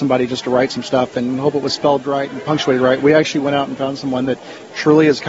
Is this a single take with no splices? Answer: yes; 0 cuts

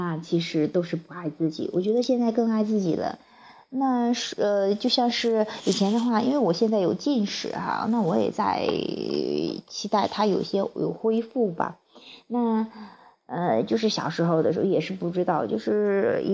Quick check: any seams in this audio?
no; 0 cuts

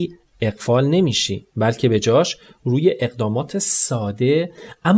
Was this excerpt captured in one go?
no; 1 cut; at 1.5 s

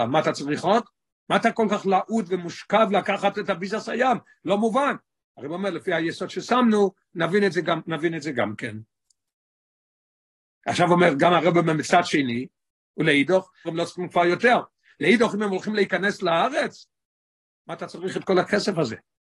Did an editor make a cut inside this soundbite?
yes; 1 cut; at 13.6 s

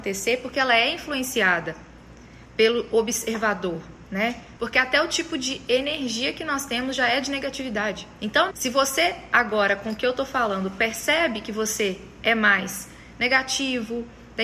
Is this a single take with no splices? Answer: no; 2 cuts; at 4.6 s, 8.5 s

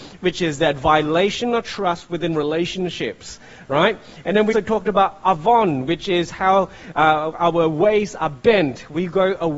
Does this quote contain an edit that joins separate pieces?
yes; 1 cut; at 4.5 s

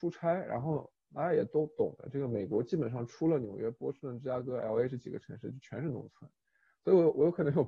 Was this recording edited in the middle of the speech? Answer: no; 0 cuts

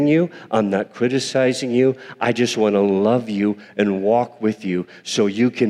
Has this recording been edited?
no; 0 cuts

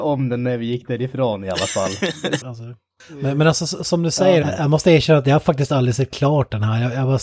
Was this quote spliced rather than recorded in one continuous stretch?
yes; 2 cuts; at 2.4 s, 4.4 s

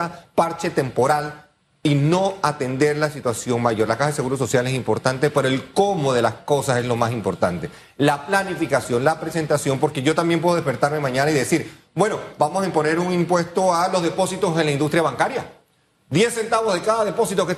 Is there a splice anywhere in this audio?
no; 0 cuts

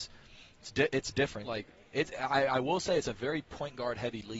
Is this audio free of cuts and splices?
no; 1 cut; at 1.4 s

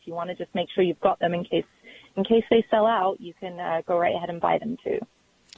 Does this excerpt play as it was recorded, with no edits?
yes; 0 cuts

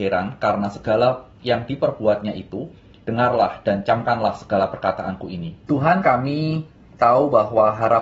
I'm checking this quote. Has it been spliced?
yes; 2 cuts; at 3.0 s, 5.7 s

